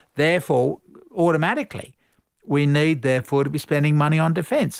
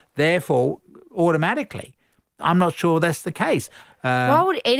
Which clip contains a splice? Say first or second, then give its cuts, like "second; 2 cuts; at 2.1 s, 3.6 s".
second; 2 cuts; at 2.4 s, 3.8 s